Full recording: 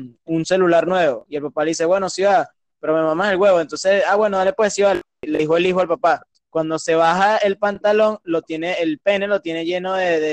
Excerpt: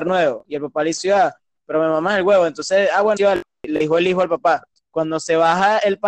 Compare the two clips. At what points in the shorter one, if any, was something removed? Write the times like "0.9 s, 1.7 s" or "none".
1.0 s, 3.2 s